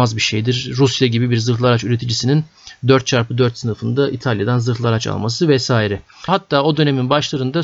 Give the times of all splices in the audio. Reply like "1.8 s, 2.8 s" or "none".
6.3 s